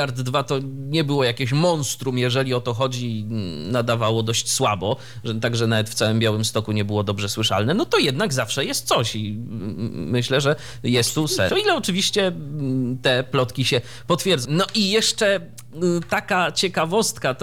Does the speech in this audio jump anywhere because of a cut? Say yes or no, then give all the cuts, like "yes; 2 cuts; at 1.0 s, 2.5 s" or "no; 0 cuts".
yes; 2 cuts; at 11.5 s, 14.5 s